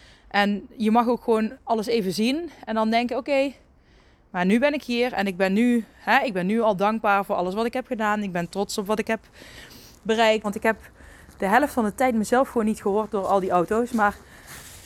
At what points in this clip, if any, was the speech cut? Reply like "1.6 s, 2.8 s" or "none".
10.4 s